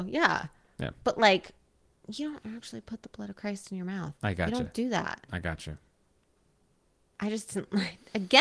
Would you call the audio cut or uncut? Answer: uncut